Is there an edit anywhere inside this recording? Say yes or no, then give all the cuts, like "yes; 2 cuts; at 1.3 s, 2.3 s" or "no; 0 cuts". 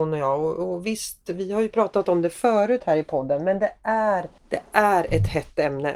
yes; 1 cut; at 4.4 s